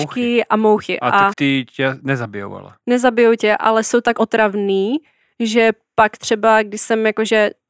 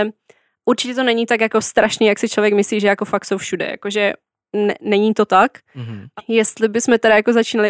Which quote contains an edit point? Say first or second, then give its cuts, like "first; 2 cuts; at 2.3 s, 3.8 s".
first; 1 cut; at 1.3 s